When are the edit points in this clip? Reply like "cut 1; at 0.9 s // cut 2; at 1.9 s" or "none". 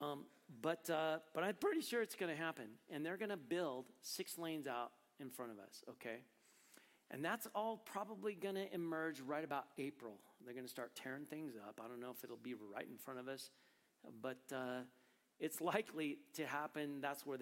none